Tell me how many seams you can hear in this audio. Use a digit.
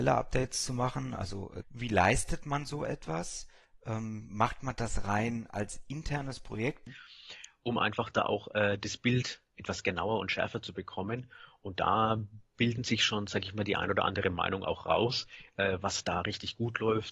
2